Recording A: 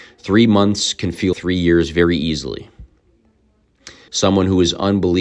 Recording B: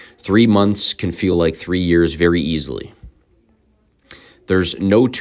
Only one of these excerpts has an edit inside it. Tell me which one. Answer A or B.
A